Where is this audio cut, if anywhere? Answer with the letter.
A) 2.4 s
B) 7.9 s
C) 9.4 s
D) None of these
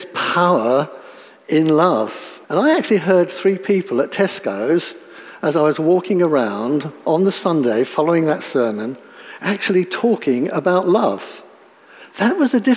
A